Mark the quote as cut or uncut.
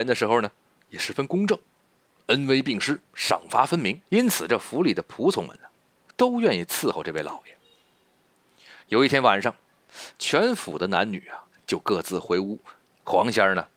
cut